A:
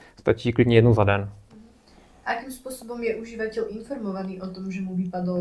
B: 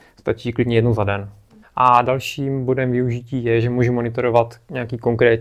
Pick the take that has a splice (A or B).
B